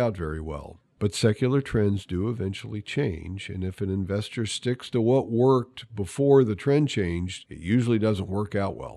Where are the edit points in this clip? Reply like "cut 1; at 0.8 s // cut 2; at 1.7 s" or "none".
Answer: none